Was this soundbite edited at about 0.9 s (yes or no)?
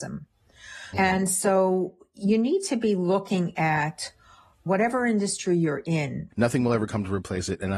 yes